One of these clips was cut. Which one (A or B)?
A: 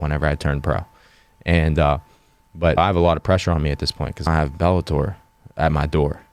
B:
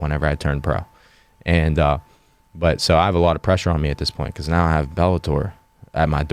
A